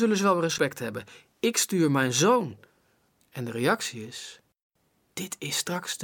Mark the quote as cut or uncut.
cut